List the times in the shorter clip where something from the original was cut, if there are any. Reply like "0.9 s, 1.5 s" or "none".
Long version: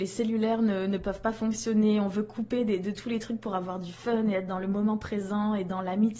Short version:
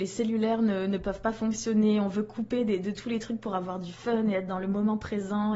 none

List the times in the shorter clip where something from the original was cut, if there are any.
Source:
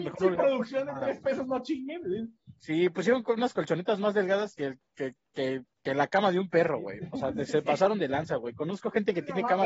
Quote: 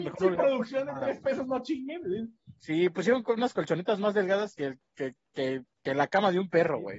none

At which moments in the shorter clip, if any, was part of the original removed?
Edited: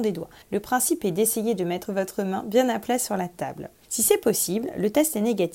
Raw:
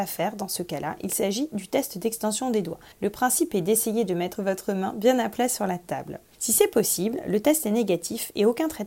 none

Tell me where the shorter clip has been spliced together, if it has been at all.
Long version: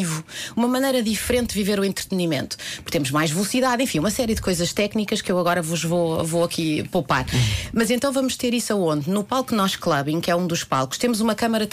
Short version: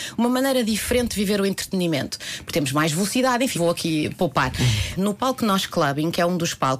3.5 s, 5.0 s

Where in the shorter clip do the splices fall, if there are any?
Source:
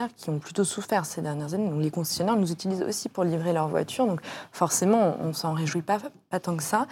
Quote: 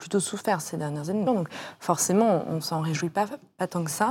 1.3 s

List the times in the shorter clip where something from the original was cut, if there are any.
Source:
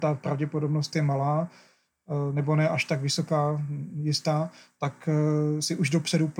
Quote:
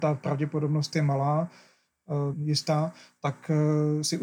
2.3 s

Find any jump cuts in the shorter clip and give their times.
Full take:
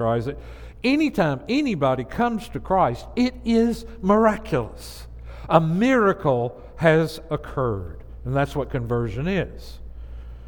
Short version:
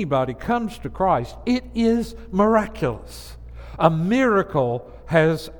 none

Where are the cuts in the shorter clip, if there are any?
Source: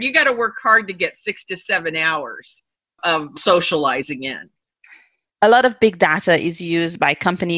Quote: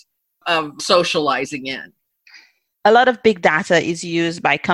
none

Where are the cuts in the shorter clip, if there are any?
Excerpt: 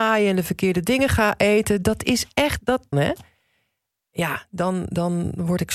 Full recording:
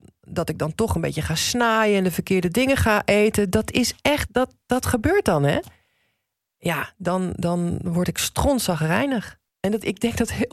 2.9 s

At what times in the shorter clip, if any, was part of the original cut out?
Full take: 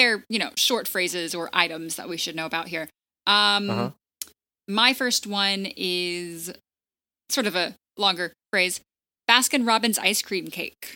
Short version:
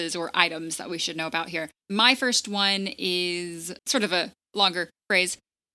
1.8 s, 3.8 s

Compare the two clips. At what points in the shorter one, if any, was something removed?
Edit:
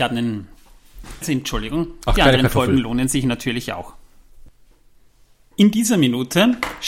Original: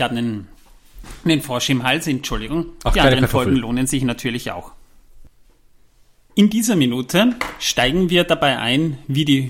1.2 s

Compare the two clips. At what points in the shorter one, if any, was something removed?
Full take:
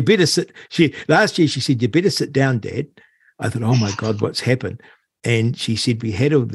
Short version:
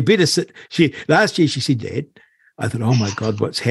1.8 s

